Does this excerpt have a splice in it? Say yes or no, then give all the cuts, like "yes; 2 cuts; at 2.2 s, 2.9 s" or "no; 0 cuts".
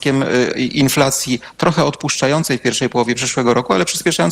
no; 0 cuts